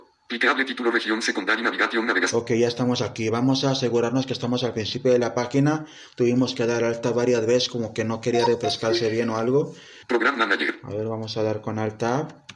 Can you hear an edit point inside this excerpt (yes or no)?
yes